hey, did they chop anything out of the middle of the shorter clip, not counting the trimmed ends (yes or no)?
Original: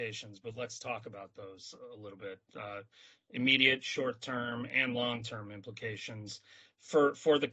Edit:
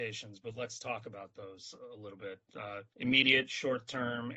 yes